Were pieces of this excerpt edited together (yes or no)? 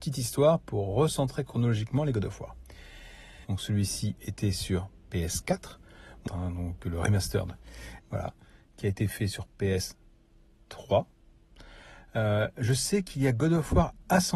yes